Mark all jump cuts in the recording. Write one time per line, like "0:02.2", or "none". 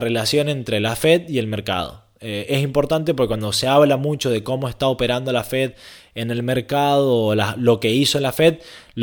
none